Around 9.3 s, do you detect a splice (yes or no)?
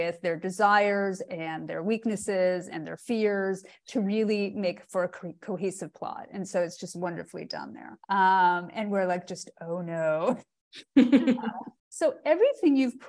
no